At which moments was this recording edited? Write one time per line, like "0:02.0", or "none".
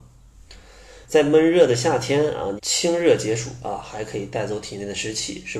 0:01.0
0:02.6